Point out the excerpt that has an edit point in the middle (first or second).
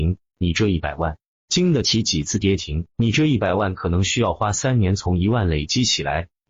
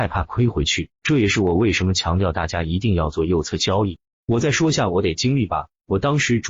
second